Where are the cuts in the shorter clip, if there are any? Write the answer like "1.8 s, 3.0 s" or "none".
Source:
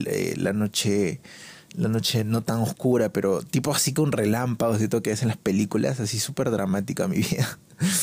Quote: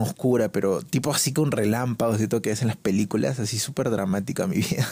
none